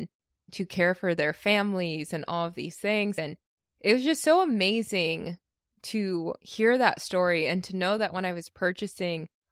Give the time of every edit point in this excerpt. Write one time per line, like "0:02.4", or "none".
none

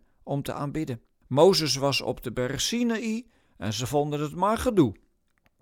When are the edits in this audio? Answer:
0:01.2

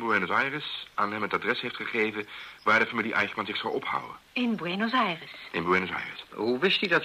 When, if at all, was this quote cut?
none

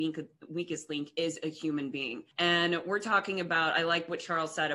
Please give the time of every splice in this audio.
0:02.3

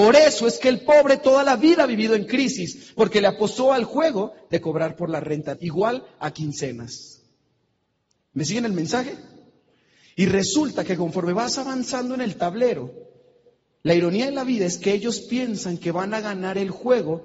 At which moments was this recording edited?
0:05.5

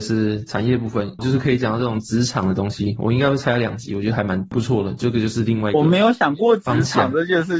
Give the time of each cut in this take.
0:01.2

